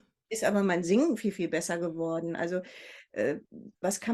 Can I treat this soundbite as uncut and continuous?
yes; 0 cuts

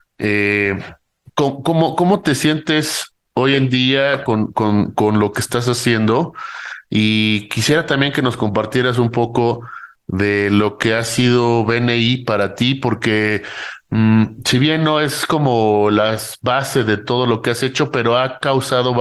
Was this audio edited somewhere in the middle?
no; 0 cuts

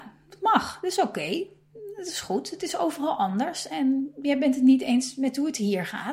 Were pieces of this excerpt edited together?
no; 0 cuts

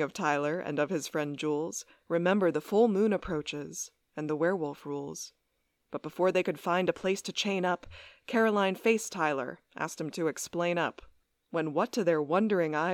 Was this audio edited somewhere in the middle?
no; 0 cuts

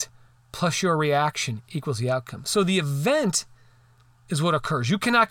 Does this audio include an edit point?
yes; 1 cut; at 4.2 s

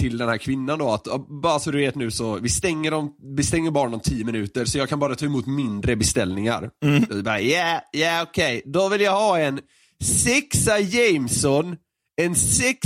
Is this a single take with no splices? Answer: yes; 0 cuts

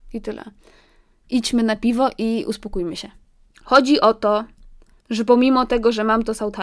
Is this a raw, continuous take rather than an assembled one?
no; 2 cuts; at 1.2 s, 3.4 s

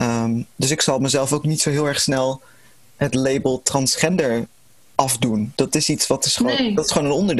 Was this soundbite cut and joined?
no; 0 cuts

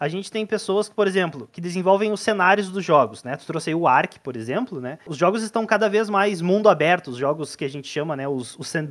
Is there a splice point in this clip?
no; 0 cuts

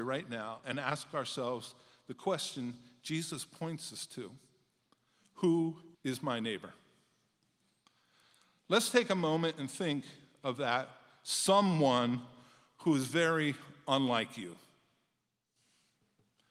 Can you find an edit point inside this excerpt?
yes; 1 cut; at 5.9 s

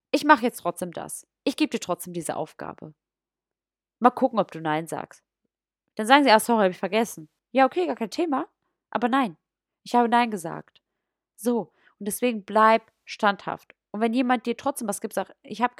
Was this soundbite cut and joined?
no; 0 cuts

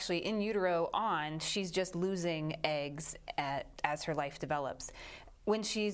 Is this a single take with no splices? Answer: yes; 0 cuts

